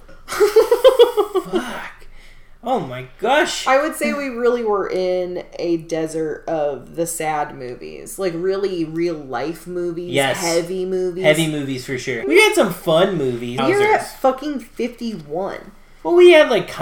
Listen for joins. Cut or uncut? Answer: cut